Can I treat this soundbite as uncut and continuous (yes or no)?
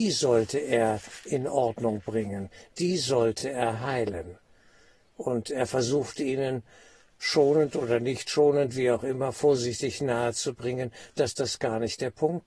yes